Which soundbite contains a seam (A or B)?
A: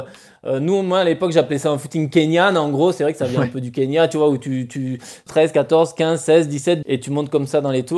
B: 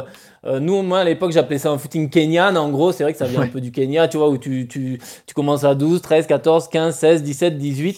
A